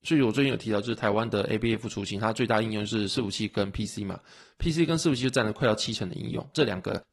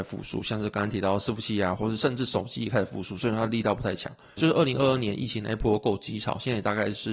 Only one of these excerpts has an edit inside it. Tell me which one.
second; 2 cuts; at 1.8 s, 4.4 s

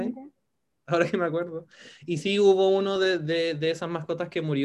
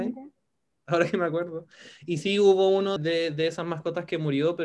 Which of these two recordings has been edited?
second; 1 cut; at 3.0 s

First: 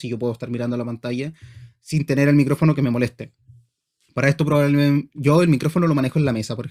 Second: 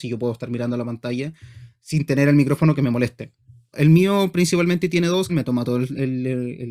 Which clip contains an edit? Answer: second; 2 cuts; at 3.7 s, 5.3 s

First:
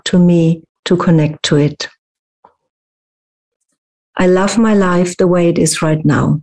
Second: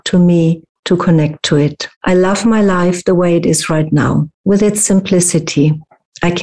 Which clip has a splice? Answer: second; 1 cut; at 1.9 s

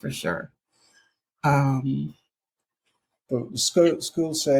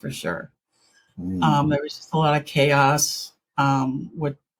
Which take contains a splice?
second; 1 cut; at 1.1 s

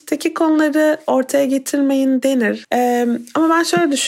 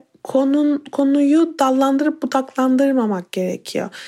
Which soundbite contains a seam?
first; 1 cut; at 2.6 s

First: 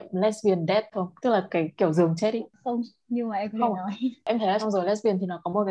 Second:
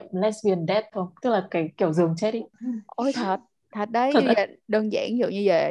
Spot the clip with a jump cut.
second; 1 cut; at 2.6 s

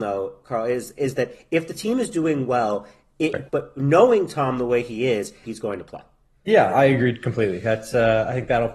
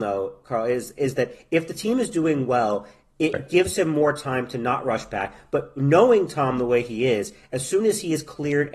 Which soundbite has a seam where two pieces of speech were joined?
first; 2 cuts; at 3.5 s, 5.4 s

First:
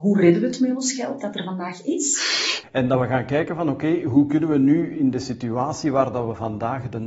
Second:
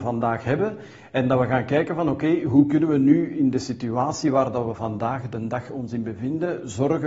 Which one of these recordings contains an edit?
first; 1 cut; at 2.6 s

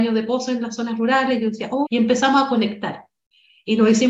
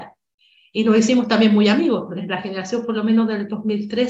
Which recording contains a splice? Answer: first; 1 cut; at 1.8 s

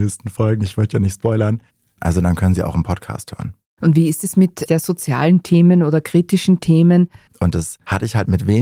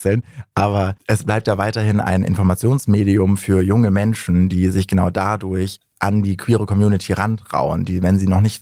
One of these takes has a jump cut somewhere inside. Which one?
first; 3 cuts; at 2.0 s, 4.7 s, 7.3 s

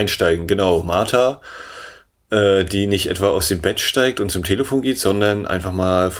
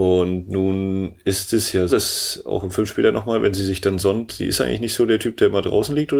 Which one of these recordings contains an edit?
second; 2 cuts; at 1.9 s, 4.3 s

